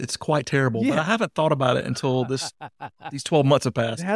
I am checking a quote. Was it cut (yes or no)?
no